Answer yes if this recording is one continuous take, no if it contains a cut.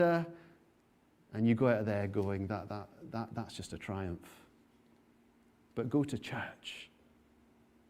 yes